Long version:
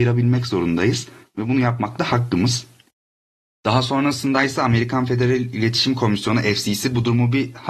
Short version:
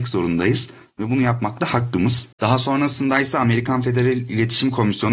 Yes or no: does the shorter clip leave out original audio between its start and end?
yes